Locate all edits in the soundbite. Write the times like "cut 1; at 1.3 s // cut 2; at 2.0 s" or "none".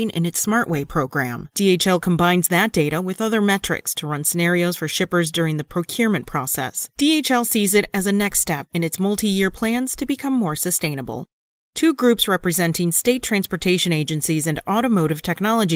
none

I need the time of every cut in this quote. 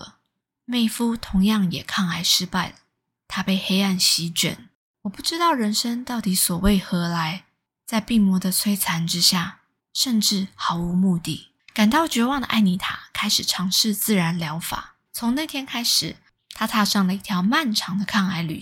cut 1; at 9.8 s // cut 2; at 15.1 s

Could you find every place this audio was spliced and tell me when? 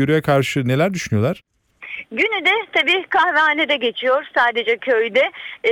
cut 1; at 2.0 s

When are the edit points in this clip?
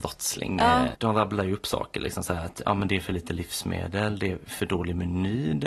cut 1; at 0.9 s

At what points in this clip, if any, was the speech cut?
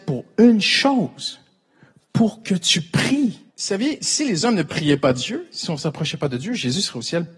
cut 1; at 3.5 s

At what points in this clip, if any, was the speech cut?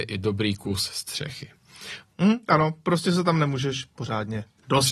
cut 1; at 2.0 s

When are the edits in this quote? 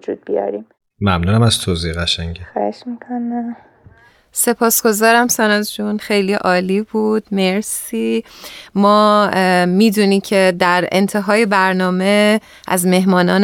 cut 1; at 6.0 s

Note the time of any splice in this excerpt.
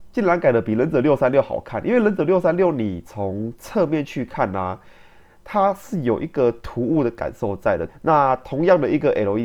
cut 1; at 7.9 s

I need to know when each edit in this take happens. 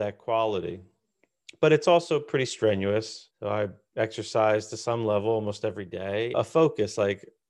cut 1; at 3.3 s // cut 2; at 6.3 s

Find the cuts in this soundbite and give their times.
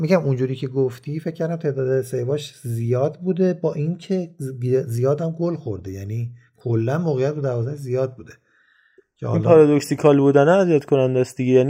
none

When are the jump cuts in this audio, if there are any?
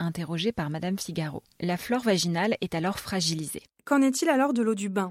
none

